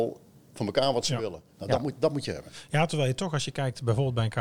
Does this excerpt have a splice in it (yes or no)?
no